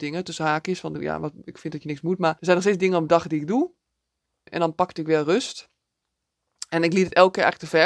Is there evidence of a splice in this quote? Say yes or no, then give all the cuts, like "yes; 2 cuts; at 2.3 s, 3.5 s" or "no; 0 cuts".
yes; 2 cuts; at 2.4 s, 4.5 s